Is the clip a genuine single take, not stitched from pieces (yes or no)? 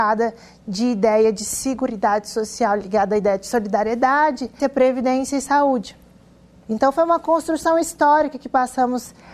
no